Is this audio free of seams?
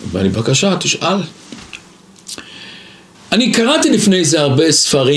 no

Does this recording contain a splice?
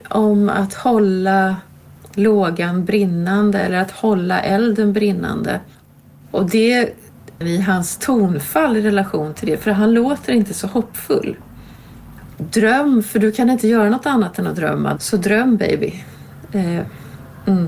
yes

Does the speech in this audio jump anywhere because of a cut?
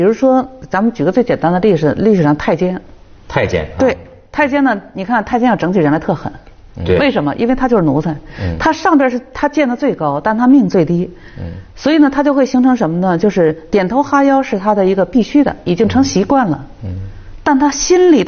no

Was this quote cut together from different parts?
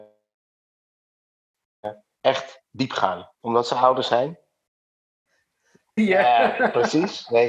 yes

